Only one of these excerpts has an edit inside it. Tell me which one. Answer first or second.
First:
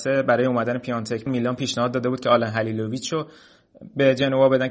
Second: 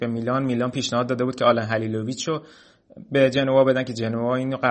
first